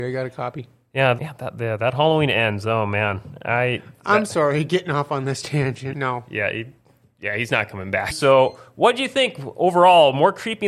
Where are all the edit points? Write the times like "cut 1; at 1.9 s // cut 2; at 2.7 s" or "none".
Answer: cut 1; at 1.2 s // cut 2; at 5.9 s // cut 3; at 8.1 s